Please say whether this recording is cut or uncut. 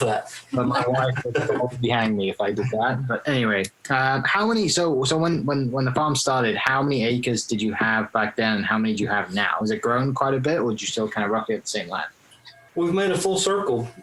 uncut